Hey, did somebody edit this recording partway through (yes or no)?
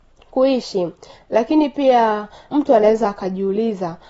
yes